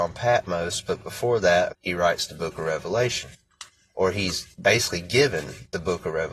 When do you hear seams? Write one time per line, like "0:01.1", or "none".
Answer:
0:01.7